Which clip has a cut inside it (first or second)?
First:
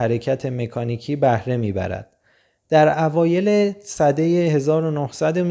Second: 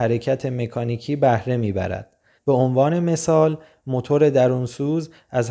second